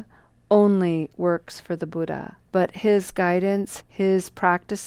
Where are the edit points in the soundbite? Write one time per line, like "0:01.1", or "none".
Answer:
0:02.4
0:03.8